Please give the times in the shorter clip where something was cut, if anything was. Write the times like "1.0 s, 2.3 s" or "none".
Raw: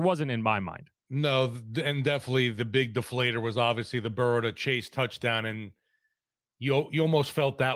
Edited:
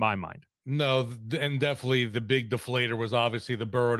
none